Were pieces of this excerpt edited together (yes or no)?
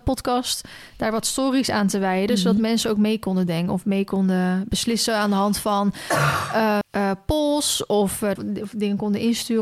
yes